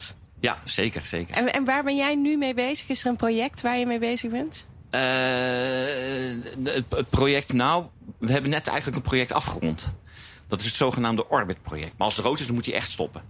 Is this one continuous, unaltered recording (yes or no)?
no